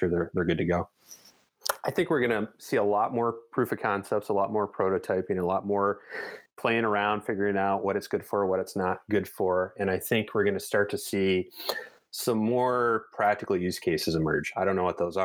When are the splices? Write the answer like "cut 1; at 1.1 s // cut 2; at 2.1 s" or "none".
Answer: none